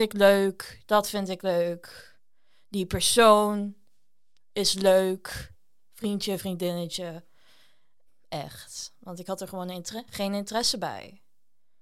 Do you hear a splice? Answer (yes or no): yes